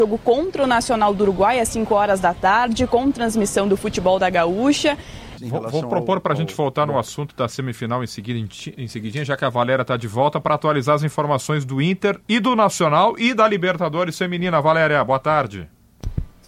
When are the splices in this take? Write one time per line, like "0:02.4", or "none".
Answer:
0:05.4